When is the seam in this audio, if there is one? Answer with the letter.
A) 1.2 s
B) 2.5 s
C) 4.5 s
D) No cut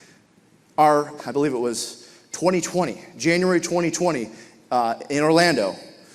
A